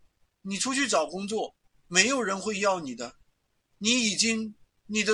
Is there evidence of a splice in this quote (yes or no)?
yes